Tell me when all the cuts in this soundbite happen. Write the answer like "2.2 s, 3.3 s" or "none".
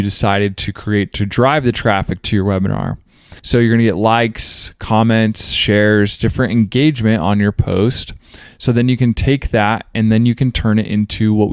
3.4 s